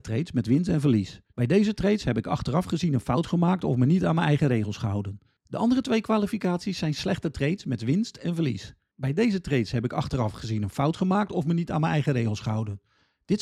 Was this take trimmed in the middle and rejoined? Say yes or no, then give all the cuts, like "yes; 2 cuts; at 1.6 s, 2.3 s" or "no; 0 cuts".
yes; 1 cut; at 1.3 s